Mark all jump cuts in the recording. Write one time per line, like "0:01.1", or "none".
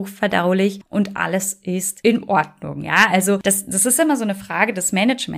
none